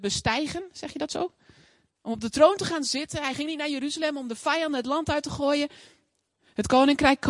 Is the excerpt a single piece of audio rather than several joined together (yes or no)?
no